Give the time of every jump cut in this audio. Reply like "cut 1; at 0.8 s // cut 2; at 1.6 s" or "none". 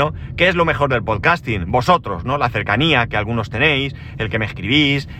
none